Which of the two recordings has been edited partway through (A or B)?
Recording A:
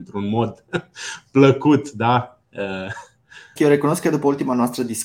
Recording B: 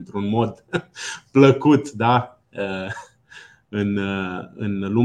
A